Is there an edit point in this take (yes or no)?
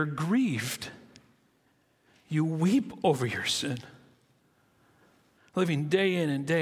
yes